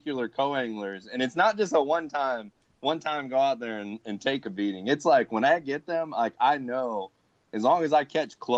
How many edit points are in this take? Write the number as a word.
zero